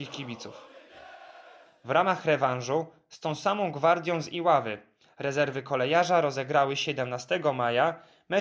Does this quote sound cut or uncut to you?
uncut